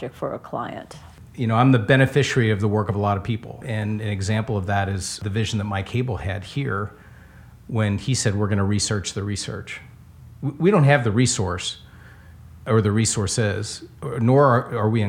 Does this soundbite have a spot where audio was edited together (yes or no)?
no